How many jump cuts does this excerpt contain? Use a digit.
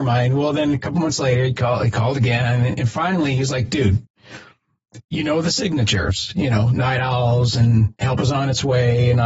0